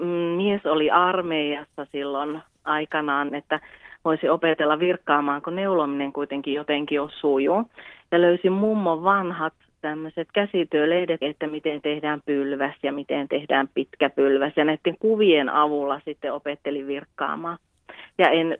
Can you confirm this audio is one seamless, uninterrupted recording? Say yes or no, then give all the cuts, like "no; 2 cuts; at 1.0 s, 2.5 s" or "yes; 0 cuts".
no; 2 cuts; at 3.3 s, 11.2 s